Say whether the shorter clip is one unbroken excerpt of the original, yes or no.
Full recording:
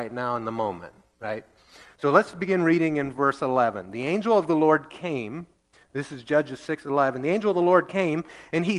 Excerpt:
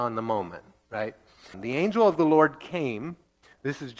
no